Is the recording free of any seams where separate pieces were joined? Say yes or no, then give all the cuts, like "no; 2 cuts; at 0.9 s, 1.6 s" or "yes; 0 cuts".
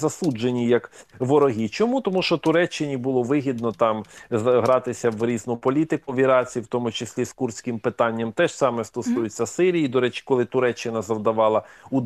yes; 0 cuts